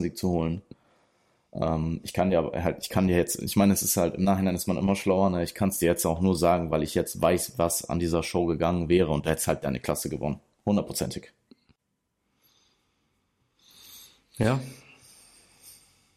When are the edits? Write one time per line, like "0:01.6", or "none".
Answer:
none